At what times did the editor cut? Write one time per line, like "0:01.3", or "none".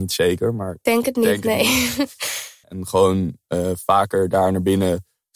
0:02.6